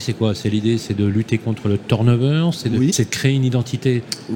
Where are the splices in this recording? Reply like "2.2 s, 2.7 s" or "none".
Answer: 2.9 s